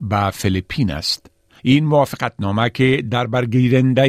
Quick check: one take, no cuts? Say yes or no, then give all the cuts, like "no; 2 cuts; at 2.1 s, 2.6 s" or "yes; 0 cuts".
no; 1 cut; at 1.6 s